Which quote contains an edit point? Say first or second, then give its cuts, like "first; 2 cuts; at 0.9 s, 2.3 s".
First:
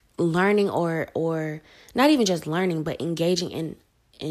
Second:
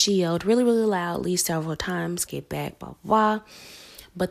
second; 1 cut; at 2.3 s